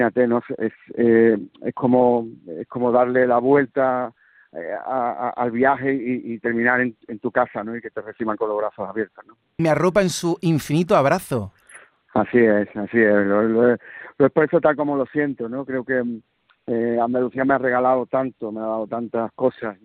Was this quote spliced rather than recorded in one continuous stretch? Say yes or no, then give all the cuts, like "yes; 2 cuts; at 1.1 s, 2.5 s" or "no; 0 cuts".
yes; 1 cut; at 9.6 s